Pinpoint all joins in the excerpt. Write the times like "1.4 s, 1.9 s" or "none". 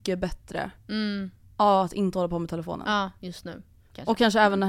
none